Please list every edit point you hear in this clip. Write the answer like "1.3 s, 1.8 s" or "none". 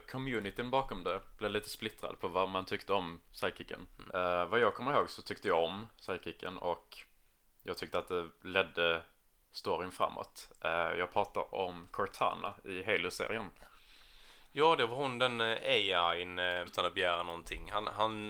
4.1 s, 16.7 s